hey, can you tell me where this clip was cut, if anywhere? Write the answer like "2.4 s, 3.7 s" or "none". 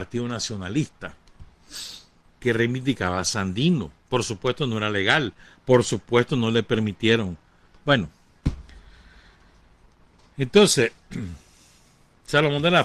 7.7 s